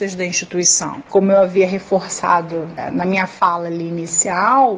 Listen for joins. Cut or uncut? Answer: cut